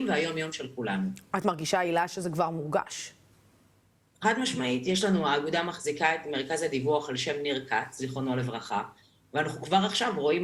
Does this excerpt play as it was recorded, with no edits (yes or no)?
yes